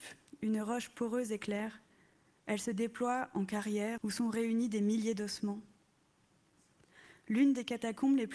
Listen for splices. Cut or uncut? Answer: cut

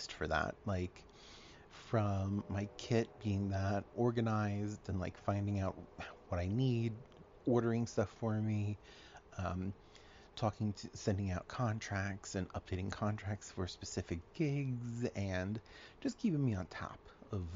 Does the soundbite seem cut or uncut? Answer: cut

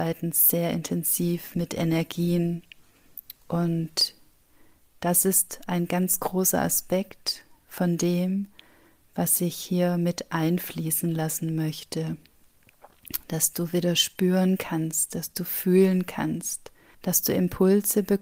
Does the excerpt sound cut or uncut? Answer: cut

